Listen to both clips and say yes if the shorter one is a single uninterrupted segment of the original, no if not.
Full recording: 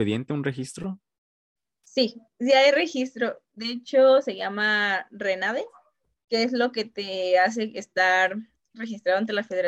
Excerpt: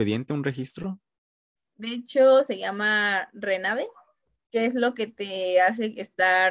no